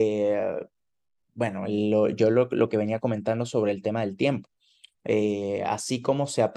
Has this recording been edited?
no; 0 cuts

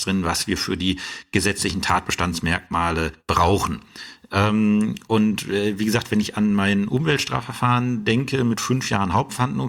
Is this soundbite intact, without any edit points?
no; 1 cut; at 3.2 s

